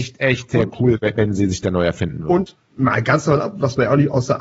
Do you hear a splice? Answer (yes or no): no